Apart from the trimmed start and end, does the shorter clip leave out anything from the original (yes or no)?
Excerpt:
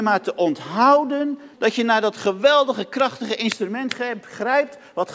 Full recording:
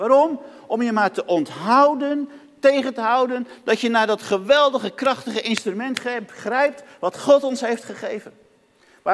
yes